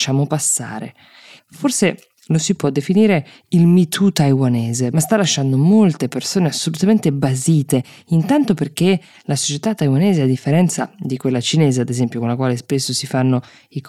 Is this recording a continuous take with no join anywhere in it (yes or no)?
no